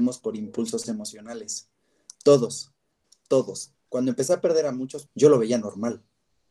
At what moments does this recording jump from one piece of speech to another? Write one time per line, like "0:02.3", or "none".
0:03.7
0:05.1